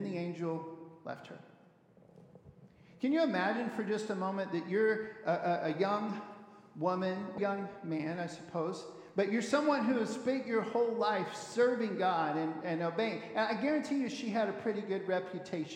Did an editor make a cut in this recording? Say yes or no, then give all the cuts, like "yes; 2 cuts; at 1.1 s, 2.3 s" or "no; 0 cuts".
yes; 1 cut; at 7.4 s